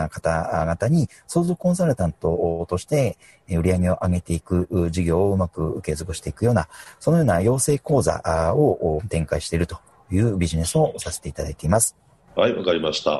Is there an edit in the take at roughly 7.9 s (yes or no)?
no